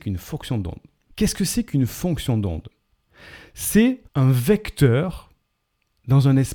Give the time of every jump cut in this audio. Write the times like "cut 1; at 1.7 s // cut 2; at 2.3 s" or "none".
cut 1; at 1.1 s // cut 2; at 4.1 s